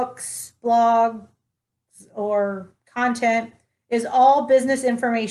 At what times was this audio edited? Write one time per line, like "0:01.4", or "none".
none